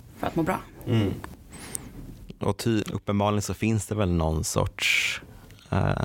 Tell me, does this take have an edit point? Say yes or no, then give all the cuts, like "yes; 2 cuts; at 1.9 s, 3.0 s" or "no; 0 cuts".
yes; 1 cut; at 2.8 s